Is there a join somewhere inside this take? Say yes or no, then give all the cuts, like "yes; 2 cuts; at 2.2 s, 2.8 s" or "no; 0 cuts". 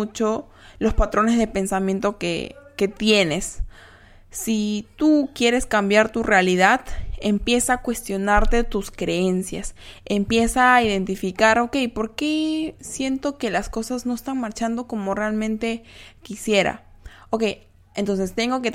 no; 0 cuts